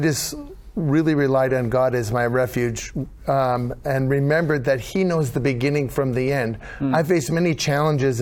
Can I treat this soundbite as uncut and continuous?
yes; 0 cuts

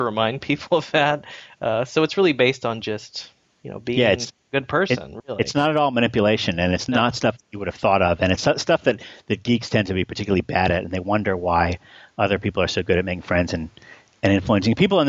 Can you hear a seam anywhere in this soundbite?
no; 0 cuts

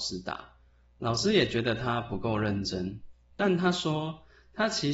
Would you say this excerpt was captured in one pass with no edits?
yes; 0 cuts

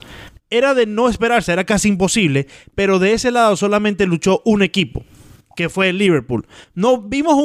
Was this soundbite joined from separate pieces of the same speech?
no; 0 cuts

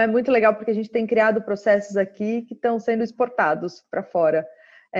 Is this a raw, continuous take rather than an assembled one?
yes; 0 cuts

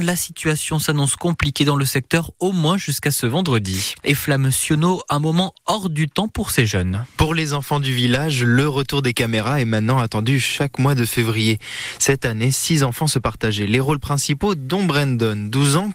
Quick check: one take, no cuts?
no; 1 cut; at 4.0 s

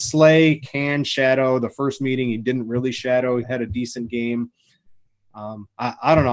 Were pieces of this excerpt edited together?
yes; 1 cut; at 3.4 s

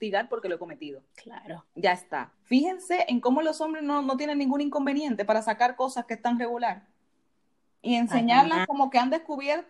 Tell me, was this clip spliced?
yes; 2 cuts; at 1.1 s, 2.3 s

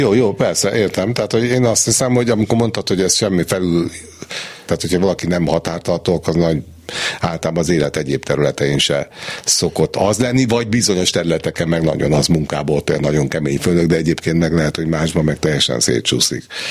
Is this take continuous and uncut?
no; 1 cut; at 4.7 s

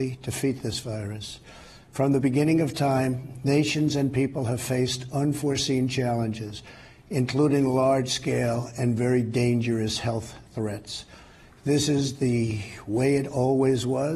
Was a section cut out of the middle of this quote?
no; 0 cuts

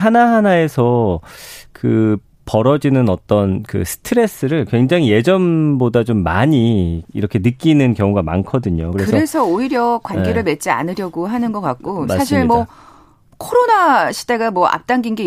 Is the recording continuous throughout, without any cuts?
yes; 0 cuts

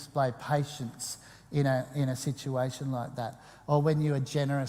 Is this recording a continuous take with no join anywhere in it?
yes; 0 cuts

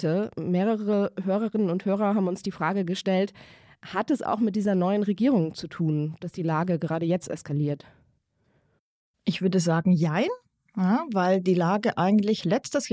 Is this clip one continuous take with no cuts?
yes; 0 cuts

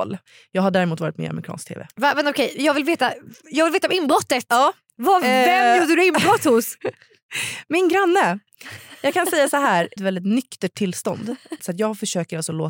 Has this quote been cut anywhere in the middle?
yes; 2 cuts; at 10.0 s, 11.6 s

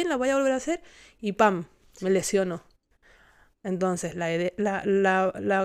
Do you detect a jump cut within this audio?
no; 0 cuts

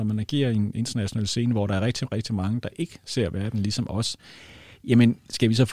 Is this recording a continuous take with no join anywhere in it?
yes; 0 cuts

